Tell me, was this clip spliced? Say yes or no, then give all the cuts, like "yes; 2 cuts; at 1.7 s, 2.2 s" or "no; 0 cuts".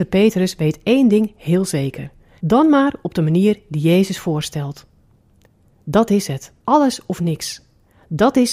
yes; 2 cuts; at 2.4 s, 6.6 s